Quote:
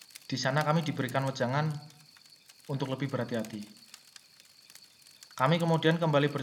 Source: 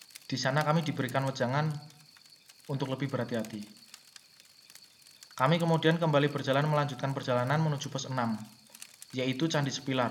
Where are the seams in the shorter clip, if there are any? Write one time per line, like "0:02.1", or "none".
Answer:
none